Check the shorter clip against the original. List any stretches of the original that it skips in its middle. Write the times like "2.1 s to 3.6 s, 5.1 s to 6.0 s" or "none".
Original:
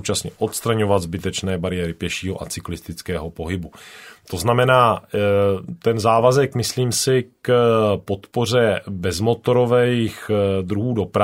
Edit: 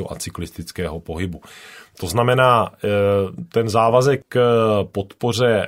6.5 s to 7.3 s